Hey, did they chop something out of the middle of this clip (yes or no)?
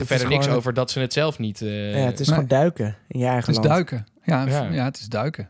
no